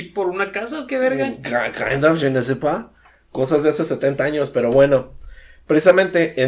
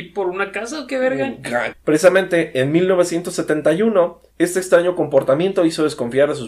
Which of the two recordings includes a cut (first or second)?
second